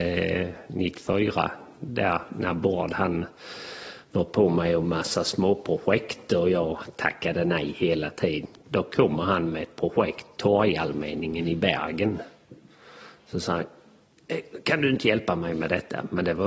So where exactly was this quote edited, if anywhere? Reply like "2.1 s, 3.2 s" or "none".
none